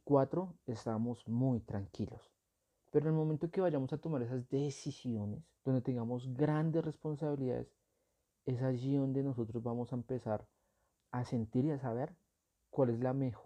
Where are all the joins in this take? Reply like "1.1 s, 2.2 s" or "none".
5.6 s